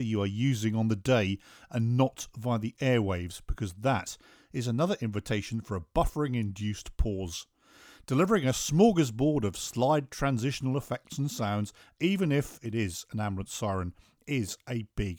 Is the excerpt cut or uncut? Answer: uncut